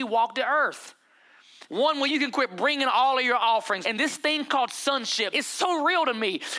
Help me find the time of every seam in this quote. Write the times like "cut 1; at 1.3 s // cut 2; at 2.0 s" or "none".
cut 1; at 1.7 s // cut 2; at 3.8 s // cut 3; at 5.3 s

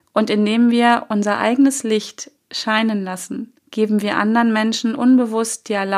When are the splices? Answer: cut 1; at 3.6 s

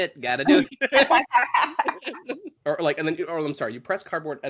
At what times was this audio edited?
cut 1; at 2.6 s

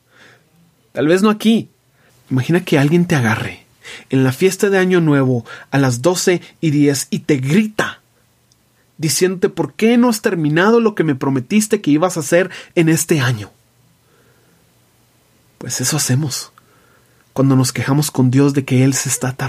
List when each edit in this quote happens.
cut 1; at 2.1 s

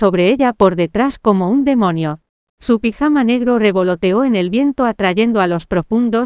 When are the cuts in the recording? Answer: none

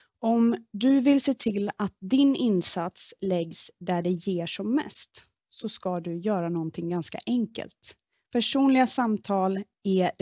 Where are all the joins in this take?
cut 1; at 8.2 s

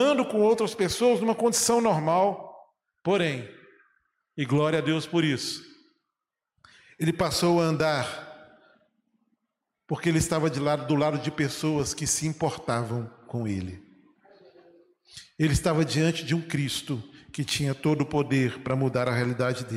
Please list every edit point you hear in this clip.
none

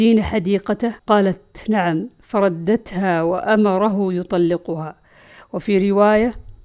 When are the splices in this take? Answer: cut 1; at 1.0 s

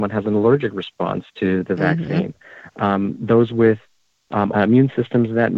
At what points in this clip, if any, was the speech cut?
cut 1; at 4.5 s

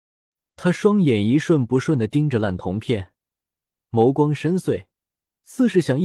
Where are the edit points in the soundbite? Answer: none

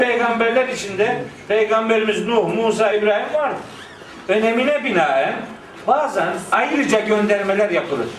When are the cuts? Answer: cut 1; at 2.9 s

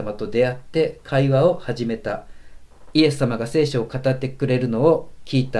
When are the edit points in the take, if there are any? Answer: none

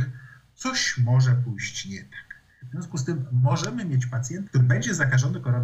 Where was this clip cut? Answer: cut 1; at 4.5 s

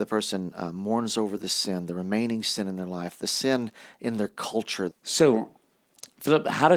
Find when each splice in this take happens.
cut 1; at 4.9 s

